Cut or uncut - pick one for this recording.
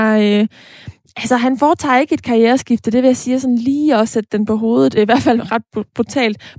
uncut